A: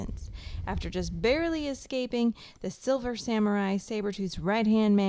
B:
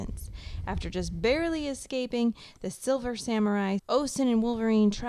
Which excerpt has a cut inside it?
B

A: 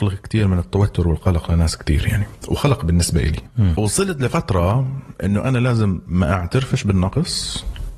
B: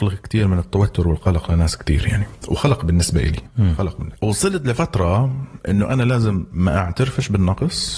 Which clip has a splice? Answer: A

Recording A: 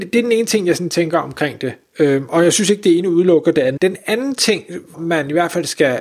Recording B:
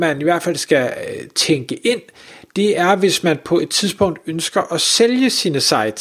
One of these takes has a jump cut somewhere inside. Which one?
A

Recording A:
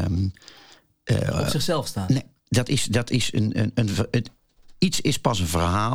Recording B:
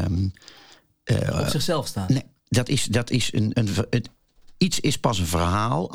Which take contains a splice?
B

